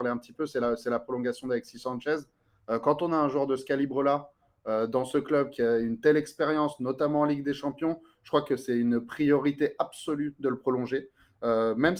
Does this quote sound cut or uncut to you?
uncut